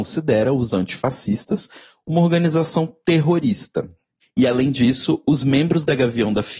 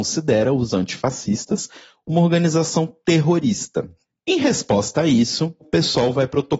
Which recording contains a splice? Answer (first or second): first